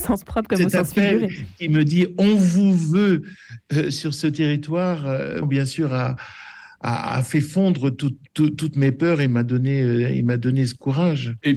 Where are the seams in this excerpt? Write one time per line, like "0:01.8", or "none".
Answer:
0:05.4